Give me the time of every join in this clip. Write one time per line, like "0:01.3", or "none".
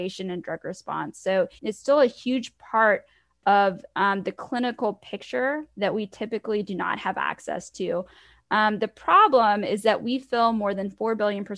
0:01.6